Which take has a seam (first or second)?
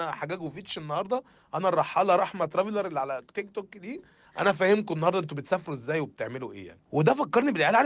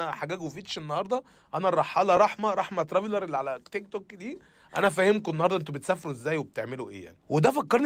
first